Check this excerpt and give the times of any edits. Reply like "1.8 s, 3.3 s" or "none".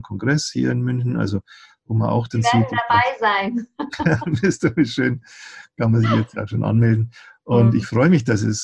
none